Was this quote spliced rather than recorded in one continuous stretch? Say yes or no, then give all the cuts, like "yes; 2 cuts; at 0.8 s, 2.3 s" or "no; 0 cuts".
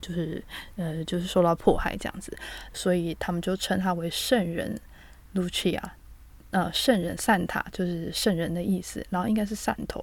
yes; 1 cut; at 5.2 s